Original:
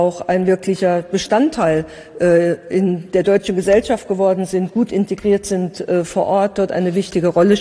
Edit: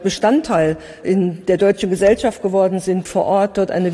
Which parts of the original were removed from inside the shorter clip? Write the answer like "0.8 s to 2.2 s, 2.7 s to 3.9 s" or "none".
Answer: 2.1 s to 2.7 s, 4.7 s to 6.1 s